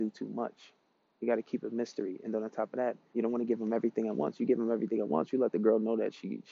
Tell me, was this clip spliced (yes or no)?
yes